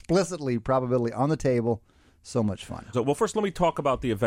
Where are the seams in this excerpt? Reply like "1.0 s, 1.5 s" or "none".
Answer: 2.9 s